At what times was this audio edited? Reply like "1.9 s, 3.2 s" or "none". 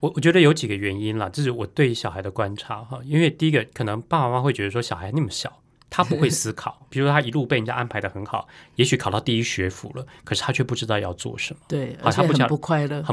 6.8 s, 8.6 s